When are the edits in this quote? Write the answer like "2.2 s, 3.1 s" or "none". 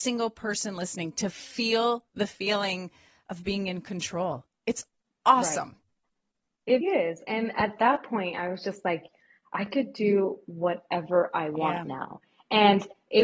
6.8 s